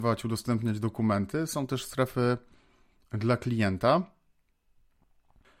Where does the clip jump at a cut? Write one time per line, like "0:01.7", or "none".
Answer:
none